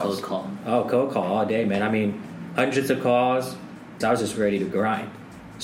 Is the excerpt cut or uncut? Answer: cut